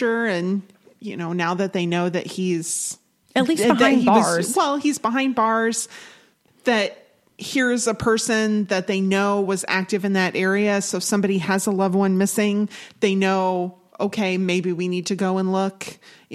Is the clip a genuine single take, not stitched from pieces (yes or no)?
yes